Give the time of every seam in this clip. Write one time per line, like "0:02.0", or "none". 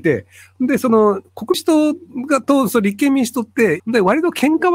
0:01.5
0:03.8